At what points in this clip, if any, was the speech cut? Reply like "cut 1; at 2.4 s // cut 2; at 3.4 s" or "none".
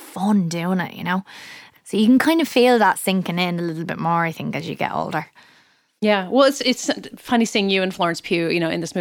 none